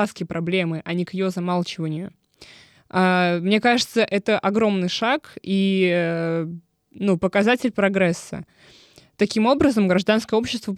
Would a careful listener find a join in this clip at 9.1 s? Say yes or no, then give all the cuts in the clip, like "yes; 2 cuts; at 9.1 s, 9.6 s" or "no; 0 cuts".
no; 0 cuts